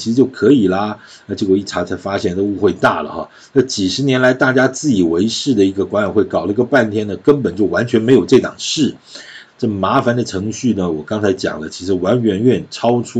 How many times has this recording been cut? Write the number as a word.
one